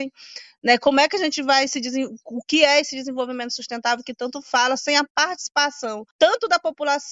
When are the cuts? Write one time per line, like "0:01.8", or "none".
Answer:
0:06.1